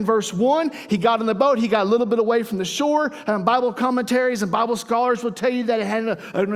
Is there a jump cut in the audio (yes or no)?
no